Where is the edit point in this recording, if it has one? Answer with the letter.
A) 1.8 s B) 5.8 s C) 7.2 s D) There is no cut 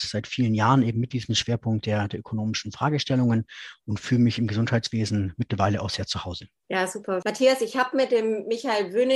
C